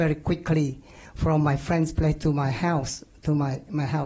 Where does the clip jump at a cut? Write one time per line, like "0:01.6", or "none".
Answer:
none